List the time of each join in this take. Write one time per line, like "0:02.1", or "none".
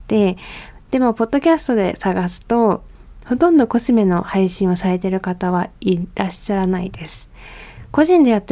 none